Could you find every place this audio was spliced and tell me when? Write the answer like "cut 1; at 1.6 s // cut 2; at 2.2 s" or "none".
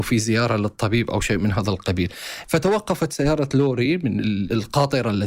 cut 1; at 2.4 s